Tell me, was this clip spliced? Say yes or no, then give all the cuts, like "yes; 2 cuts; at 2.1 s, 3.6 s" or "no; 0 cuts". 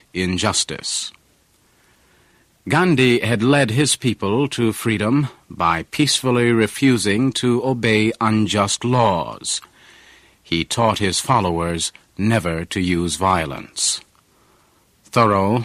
no; 0 cuts